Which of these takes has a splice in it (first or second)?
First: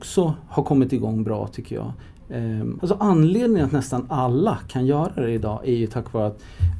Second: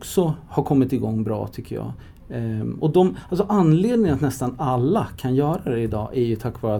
first